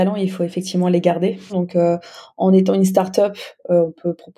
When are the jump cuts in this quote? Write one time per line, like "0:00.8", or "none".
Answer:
0:01.5